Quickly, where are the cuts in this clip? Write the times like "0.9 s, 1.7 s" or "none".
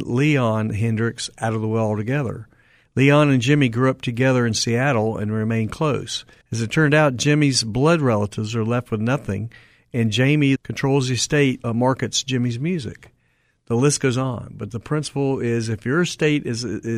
6.4 s, 10.6 s, 11.6 s